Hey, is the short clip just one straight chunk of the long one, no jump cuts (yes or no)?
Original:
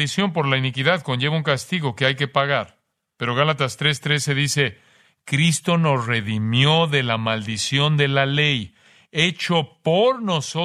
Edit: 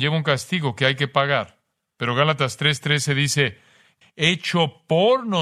no